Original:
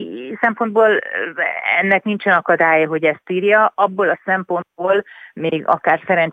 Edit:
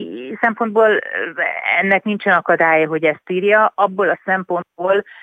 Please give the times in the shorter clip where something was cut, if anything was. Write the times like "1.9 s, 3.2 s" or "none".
none